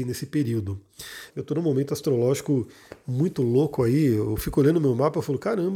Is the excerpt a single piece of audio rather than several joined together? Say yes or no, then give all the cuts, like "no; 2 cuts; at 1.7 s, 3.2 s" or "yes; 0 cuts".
no; 1 cut; at 1.3 s